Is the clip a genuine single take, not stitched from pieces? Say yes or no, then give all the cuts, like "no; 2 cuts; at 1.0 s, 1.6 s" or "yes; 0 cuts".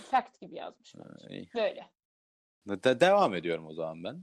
no; 1 cut; at 2.6 s